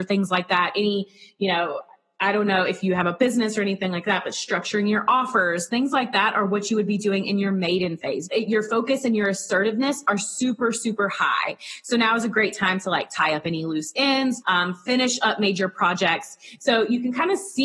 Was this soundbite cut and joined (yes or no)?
yes